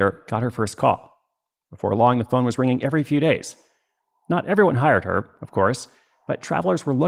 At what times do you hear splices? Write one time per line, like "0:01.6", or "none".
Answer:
none